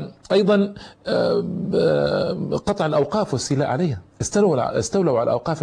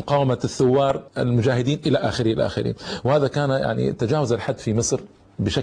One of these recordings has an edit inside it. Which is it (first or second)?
second